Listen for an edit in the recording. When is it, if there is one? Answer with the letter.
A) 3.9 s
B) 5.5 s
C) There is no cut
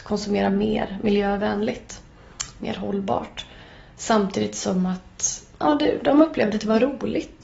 B